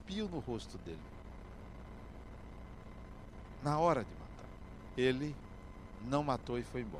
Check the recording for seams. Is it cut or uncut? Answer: cut